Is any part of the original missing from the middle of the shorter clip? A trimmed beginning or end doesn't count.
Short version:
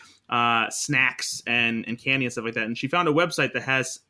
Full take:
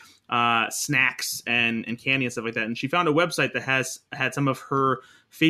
no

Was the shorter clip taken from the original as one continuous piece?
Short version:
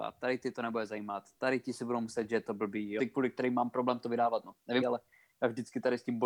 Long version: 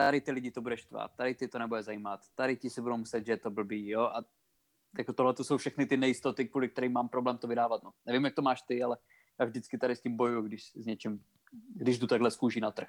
no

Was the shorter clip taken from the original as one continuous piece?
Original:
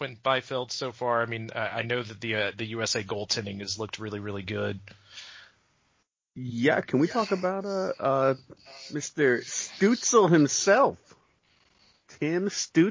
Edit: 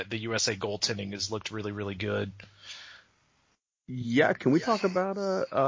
yes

